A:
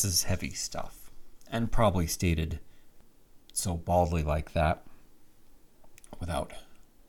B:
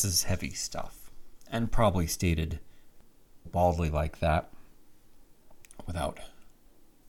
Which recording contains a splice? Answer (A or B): B